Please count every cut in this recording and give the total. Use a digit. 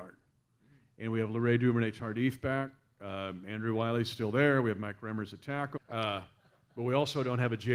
1